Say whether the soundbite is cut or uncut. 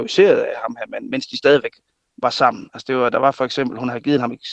uncut